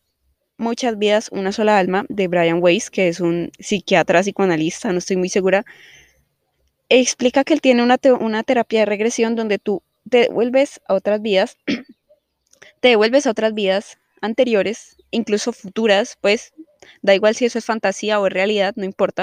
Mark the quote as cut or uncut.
cut